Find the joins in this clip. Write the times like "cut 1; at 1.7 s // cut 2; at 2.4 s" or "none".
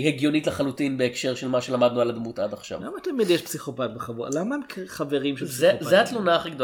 none